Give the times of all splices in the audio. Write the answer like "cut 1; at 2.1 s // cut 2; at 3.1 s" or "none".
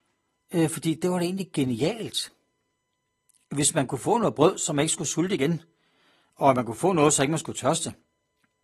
none